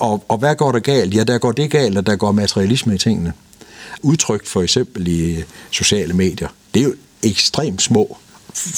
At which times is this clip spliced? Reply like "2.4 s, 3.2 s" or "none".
4.0 s